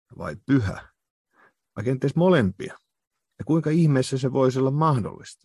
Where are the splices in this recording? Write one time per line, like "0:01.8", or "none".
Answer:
0:01.6
0:03.3